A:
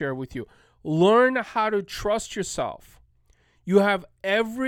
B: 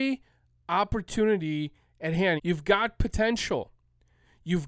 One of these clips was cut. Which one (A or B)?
B